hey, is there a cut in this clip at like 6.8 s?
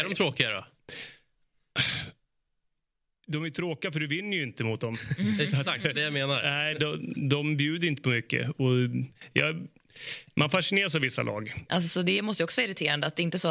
no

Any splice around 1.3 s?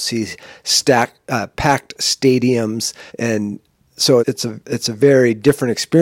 no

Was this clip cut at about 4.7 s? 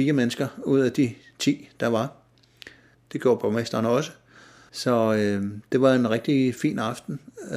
yes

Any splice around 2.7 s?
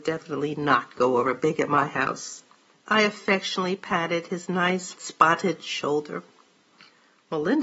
yes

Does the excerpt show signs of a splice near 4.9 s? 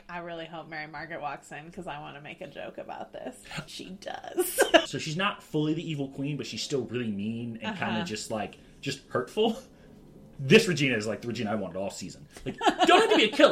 yes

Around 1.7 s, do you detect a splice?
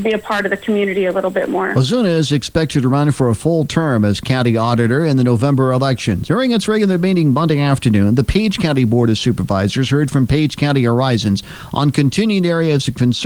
no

